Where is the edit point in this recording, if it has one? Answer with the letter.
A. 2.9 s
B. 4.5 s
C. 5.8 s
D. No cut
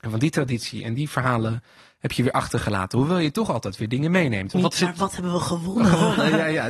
B